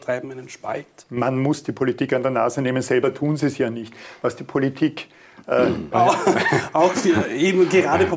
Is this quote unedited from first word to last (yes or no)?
no